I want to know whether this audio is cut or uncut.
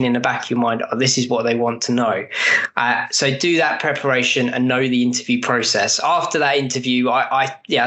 uncut